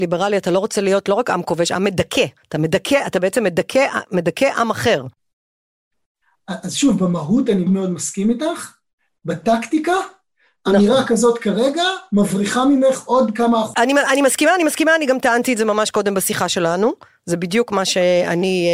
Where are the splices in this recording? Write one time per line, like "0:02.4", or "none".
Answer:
0:07.7